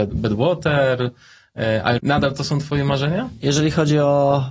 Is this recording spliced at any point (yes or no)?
yes